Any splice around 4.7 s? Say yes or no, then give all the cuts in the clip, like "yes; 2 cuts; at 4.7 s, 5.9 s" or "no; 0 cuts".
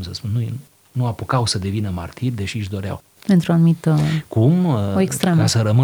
no; 1 cut; at 3.2 s